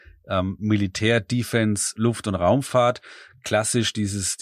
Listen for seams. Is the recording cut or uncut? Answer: uncut